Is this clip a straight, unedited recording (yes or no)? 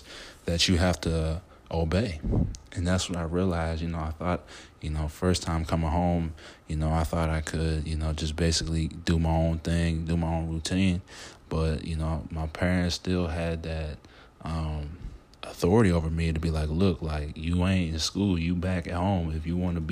yes